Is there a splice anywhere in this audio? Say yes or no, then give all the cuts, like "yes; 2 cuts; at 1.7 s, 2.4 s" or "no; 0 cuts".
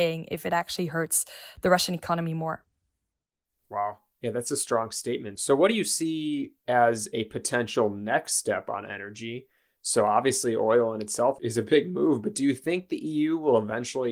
no; 0 cuts